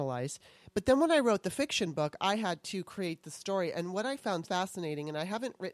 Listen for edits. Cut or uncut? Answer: cut